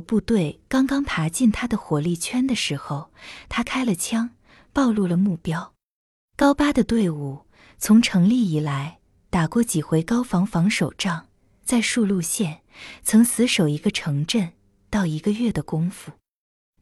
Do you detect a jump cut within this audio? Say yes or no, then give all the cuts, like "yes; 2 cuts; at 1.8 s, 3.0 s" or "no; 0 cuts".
no; 0 cuts